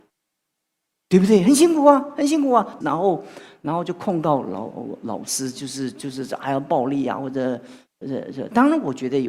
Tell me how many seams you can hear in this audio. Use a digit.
1